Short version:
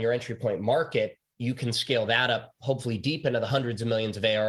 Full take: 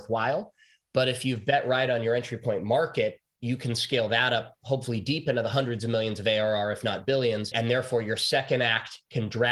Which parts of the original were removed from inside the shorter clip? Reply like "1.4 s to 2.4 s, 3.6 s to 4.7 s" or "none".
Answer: none